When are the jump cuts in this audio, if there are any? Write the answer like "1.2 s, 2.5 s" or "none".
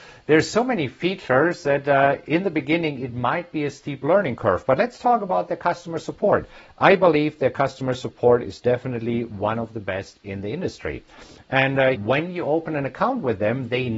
11.9 s